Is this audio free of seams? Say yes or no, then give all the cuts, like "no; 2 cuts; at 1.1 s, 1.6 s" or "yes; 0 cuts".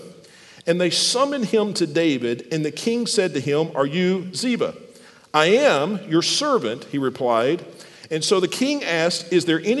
yes; 0 cuts